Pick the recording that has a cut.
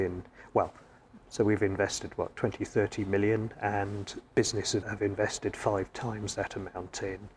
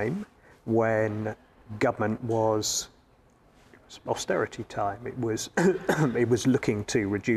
first; 1 cut; at 4.8 s

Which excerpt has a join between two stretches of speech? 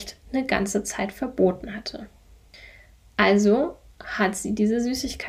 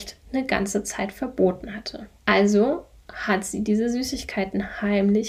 second; 1 cut; at 2.2 s

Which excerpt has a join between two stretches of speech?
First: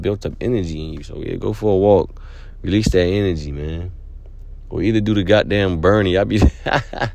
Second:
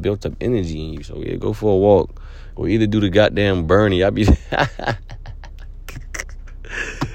second; 1 cut; at 2.5 s

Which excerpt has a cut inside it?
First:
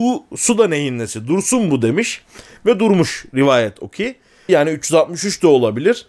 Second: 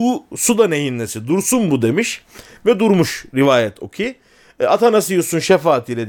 first; 1 cut; at 4.5 s

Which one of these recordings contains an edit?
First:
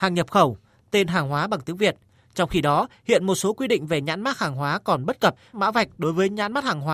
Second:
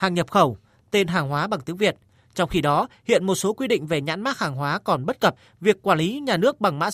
first; 1 cut; at 5.5 s

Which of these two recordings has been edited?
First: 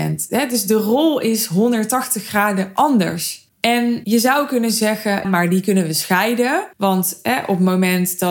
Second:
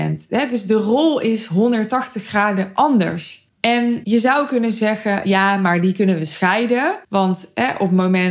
first; 1 cut; at 5.2 s

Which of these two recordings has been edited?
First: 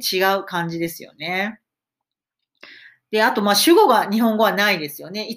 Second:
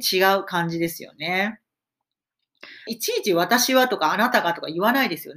second; 1 cut; at 2.9 s

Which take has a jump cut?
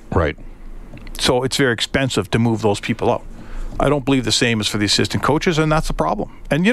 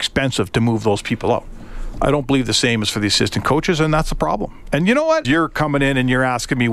second; 1 cut; at 5.2 s

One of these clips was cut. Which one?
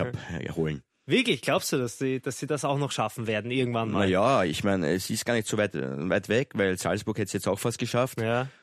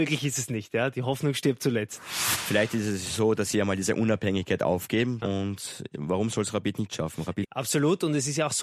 second; 2 cuts; at 5.2 s, 7.4 s

